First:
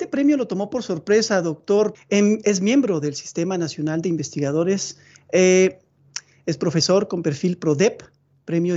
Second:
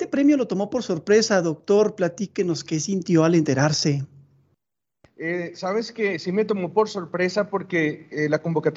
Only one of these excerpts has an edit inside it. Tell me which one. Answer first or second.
first